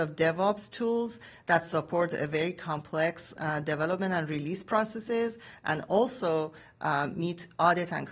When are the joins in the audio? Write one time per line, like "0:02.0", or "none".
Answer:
none